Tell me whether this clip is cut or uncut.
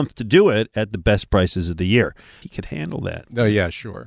cut